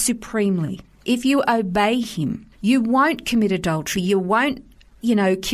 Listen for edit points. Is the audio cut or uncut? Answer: cut